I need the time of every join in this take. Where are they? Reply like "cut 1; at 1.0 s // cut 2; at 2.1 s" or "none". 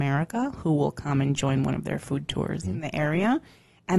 cut 1; at 2.6 s